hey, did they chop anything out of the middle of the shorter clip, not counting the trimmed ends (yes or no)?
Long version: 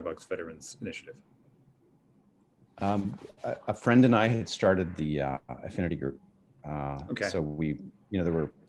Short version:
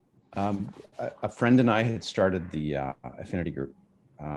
no